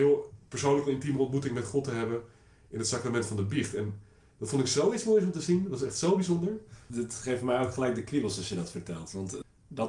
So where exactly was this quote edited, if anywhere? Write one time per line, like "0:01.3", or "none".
none